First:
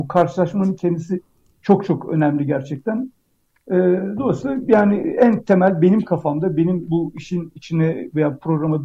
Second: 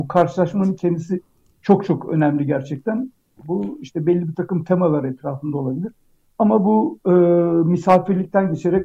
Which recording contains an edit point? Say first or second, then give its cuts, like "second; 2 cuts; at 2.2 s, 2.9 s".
second; 1 cut; at 3.4 s